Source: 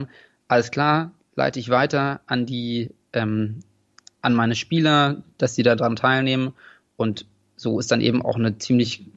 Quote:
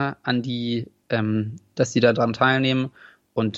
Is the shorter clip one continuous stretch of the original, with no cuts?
no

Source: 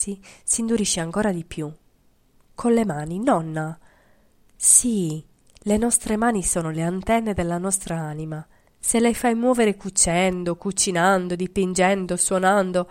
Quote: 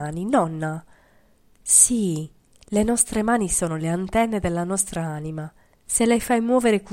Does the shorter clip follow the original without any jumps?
yes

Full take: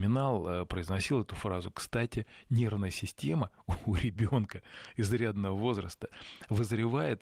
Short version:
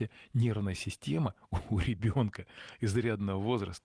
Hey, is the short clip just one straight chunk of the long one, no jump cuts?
yes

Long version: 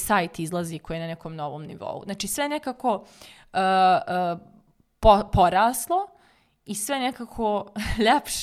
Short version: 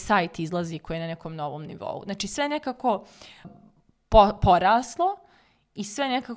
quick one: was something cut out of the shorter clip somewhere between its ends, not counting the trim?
yes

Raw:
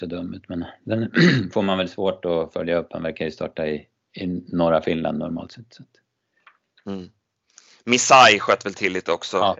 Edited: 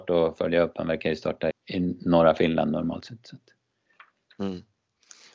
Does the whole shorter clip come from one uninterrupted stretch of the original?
no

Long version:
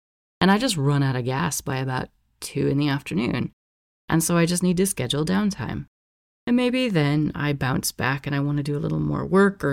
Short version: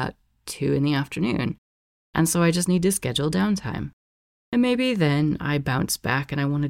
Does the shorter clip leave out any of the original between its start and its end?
no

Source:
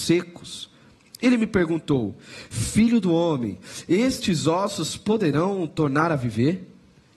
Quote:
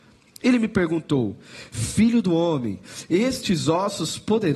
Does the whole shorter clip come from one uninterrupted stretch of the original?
yes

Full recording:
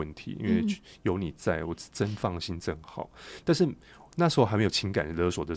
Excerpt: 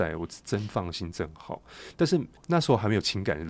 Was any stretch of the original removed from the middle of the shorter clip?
yes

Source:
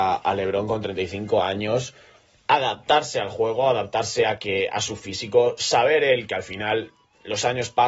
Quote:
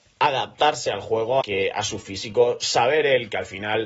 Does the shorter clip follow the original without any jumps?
no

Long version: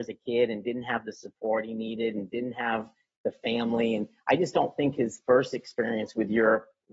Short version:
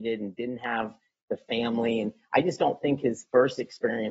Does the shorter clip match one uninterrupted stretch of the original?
yes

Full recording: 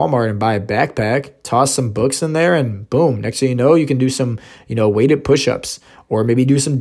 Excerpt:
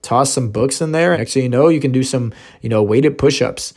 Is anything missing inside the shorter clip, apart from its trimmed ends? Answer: yes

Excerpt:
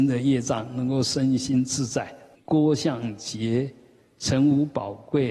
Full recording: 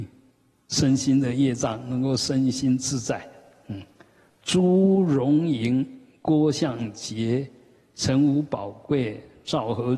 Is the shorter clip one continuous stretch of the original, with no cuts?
no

